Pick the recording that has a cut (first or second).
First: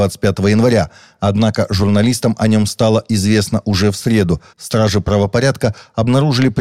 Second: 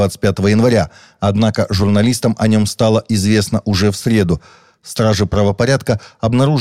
first